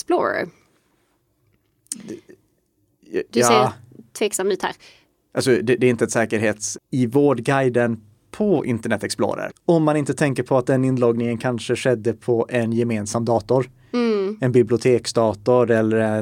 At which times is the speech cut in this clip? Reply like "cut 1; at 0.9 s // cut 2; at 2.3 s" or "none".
cut 1; at 6.7 s // cut 2; at 9.5 s